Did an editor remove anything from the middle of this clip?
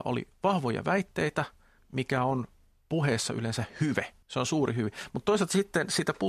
yes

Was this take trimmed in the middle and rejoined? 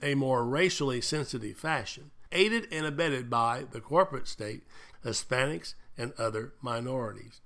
yes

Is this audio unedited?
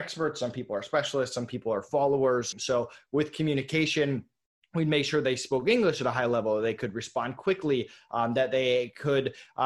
no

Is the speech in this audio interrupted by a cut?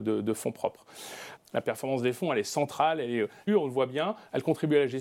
yes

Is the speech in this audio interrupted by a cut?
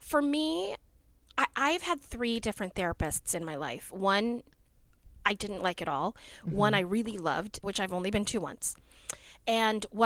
yes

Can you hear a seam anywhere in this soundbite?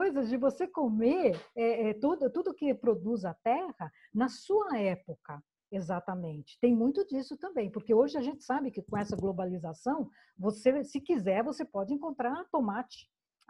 no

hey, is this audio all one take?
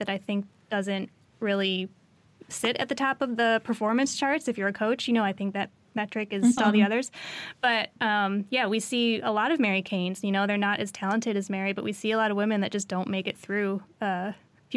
no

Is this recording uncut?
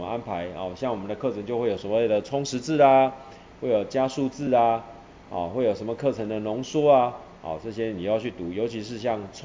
yes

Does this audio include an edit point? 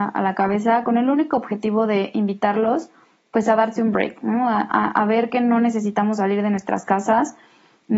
no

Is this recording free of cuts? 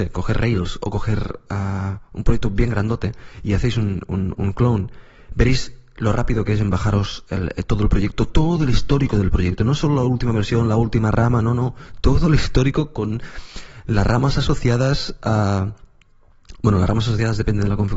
yes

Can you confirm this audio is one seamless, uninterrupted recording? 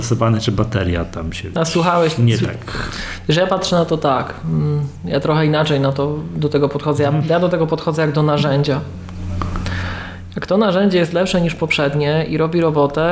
yes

